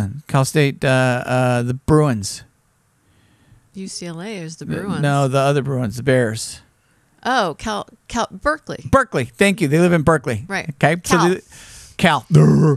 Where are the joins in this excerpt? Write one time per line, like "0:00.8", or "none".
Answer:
none